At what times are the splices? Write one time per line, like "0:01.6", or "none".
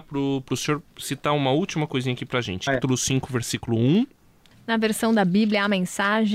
0:02.7